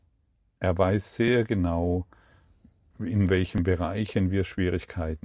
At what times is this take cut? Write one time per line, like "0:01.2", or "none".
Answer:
0:02.9